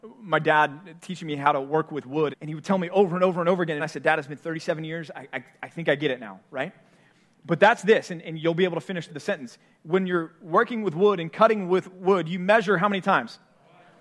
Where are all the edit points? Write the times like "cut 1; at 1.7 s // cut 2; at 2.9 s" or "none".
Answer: cut 1; at 2.3 s // cut 2; at 3.8 s // cut 3; at 9.1 s